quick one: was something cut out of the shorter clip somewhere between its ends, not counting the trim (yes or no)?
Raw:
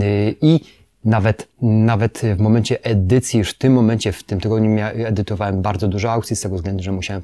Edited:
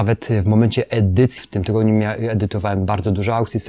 yes